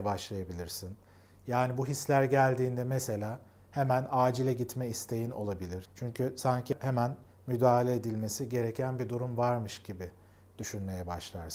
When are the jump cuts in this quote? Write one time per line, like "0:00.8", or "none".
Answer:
0:05.8